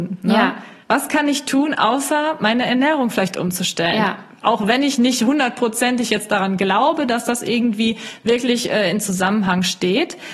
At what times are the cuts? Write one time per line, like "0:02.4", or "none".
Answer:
none